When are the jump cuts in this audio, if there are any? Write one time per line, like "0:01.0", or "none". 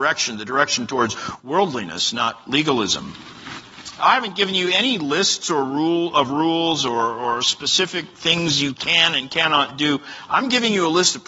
0:04.0